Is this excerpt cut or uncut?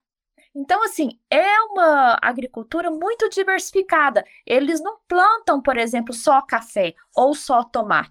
uncut